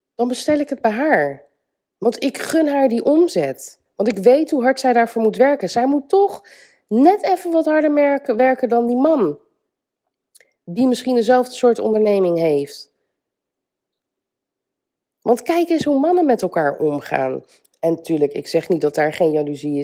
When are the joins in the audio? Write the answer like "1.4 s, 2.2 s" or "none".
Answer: none

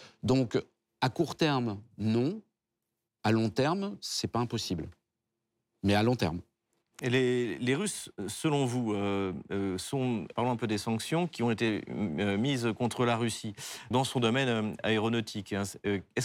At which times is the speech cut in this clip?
10.3 s, 13.9 s

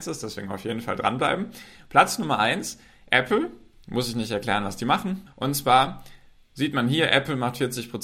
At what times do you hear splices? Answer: 5.3 s

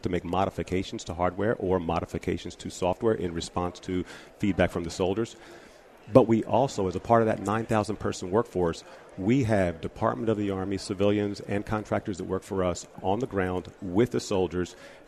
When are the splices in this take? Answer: none

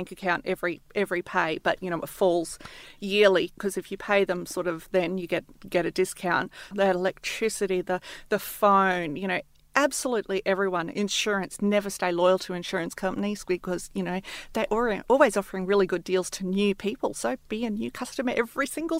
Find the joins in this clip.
6.7 s

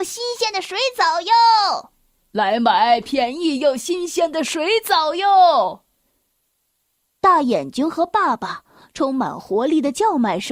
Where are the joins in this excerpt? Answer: none

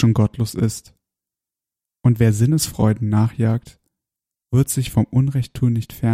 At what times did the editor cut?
none

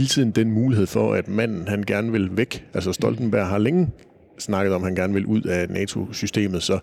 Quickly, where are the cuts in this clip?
none

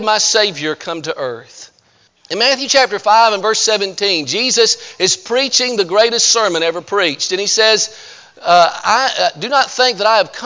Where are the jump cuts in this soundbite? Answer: 2.1 s

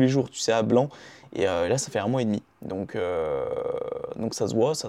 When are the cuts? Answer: none

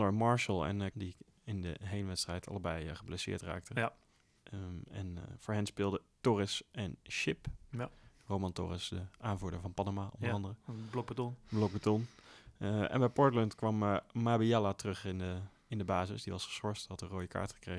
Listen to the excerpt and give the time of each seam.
0.9 s

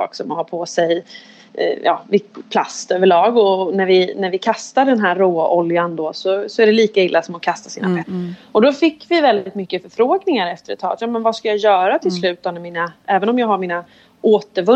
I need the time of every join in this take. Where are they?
8.0 s

